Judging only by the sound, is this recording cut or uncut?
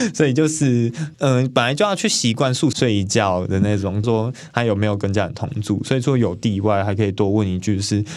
cut